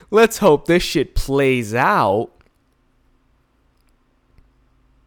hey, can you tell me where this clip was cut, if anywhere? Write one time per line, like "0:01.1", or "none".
none